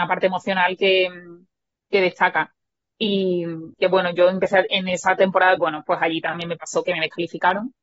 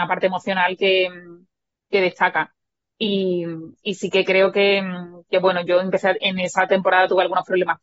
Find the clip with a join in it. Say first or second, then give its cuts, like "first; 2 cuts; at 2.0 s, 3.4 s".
first; 2 cuts; at 3.7 s, 5.6 s